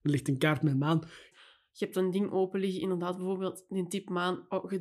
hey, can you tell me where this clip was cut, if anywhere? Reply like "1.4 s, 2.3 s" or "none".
1.3 s